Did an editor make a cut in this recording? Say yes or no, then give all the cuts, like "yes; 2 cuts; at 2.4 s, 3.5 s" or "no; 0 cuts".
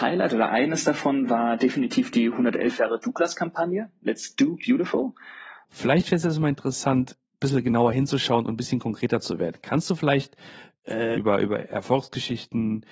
yes; 2 cuts; at 5.6 s, 11.1 s